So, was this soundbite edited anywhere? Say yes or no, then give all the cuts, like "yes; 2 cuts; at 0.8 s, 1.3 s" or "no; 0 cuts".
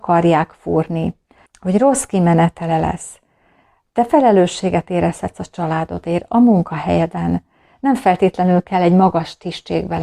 yes; 1 cut; at 1.5 s